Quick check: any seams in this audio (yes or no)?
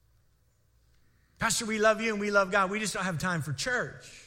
no